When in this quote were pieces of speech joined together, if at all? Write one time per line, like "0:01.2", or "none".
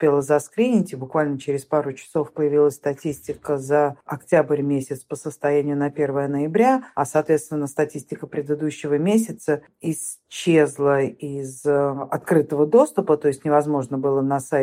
none